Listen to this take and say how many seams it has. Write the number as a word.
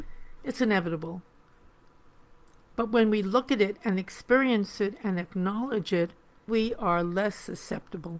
one